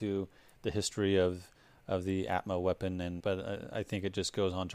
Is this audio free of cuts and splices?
no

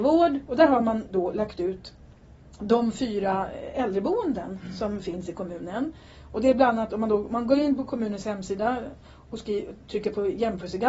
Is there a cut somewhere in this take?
no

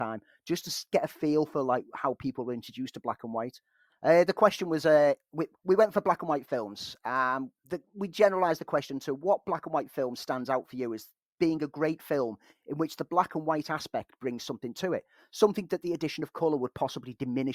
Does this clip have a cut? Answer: yes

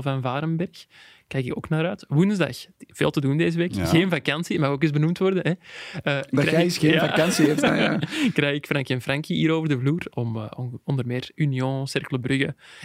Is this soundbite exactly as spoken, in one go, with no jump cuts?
yes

